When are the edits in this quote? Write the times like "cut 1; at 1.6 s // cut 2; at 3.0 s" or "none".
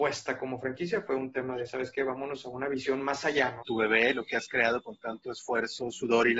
cut 1; at 3.6 s

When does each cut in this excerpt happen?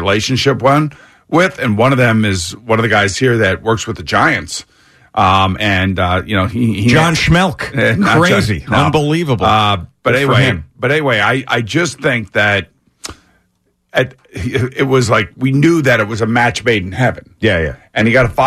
none

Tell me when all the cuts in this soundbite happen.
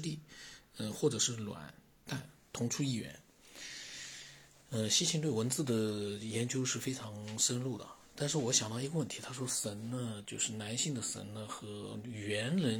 none

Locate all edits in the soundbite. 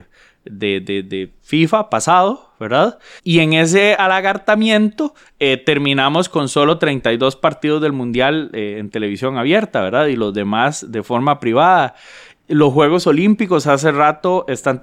cut 1; at 3.2 s

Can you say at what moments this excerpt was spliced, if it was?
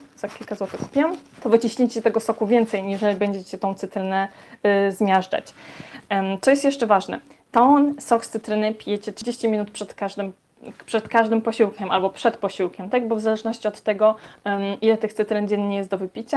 cut 1; at 1.3 s

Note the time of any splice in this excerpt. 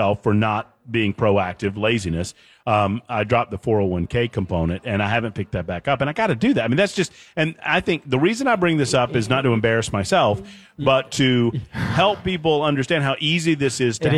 none

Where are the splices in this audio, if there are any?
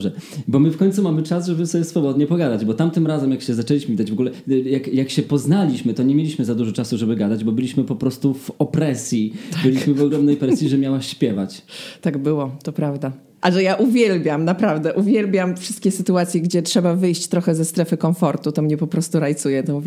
cut 1; at 13.4 s

